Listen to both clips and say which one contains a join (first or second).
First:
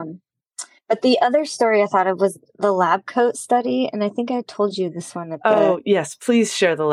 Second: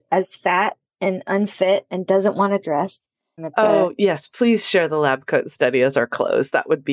second